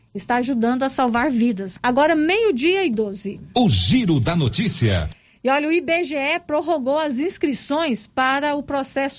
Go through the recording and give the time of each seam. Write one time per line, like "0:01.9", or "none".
0:01.8